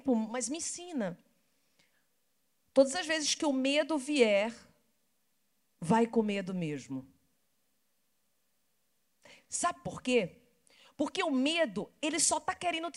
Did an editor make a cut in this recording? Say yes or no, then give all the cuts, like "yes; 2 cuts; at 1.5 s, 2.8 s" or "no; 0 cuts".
no; 0 cuts